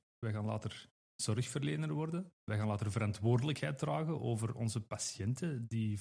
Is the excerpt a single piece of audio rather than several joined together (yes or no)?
no